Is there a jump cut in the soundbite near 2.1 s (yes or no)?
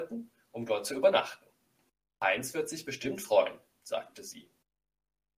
no